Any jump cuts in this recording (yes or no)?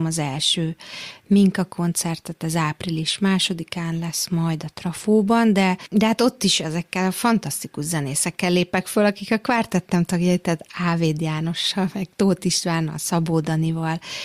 no